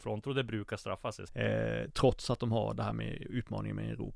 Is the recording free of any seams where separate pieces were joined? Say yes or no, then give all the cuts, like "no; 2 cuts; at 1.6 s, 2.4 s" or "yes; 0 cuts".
no; 1 cut; at 1.3 s